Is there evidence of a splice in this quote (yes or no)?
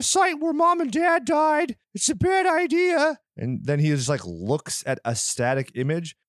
no